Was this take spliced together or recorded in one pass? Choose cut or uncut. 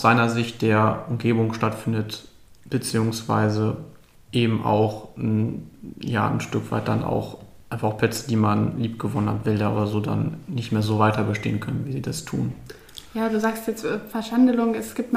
uncut